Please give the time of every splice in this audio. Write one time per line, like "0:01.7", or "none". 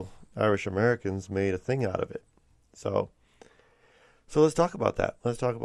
none